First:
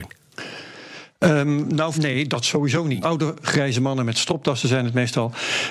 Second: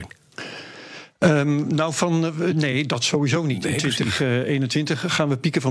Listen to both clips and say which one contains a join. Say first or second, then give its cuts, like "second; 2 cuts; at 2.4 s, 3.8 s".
first; 2 cuts; at 1.9 s, 3.0 s